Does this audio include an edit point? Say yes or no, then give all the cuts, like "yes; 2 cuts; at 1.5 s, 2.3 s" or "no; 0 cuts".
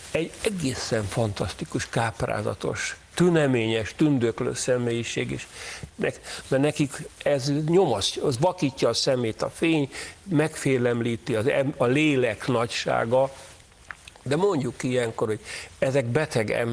yes; 1 cut; at 5.9 s